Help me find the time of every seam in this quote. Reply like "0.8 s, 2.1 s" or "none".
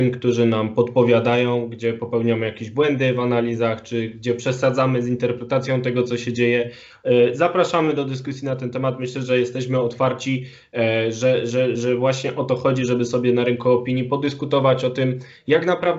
none

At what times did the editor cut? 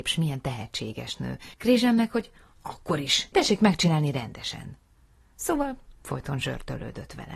1.5 s, 3.3 s

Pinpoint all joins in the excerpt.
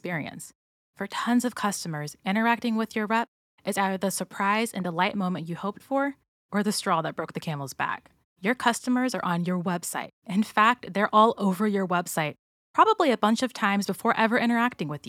8.2 s

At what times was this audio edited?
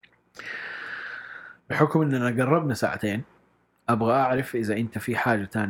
1.6 s

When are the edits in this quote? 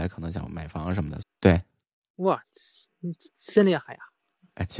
1.2 s

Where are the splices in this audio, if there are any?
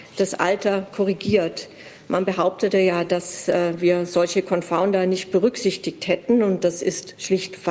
none

